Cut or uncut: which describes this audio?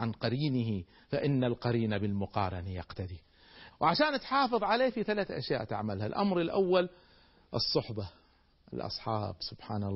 cut